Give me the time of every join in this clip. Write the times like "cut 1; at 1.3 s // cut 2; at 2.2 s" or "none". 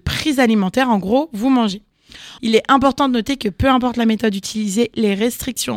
cut 1; at 2.4 s